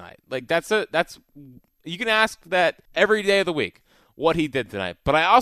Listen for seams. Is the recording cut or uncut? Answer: cut